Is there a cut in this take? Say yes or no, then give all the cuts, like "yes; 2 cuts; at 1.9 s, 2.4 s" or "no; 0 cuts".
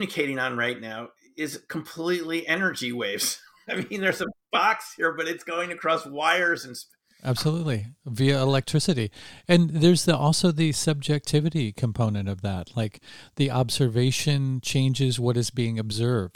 no; 0 cuts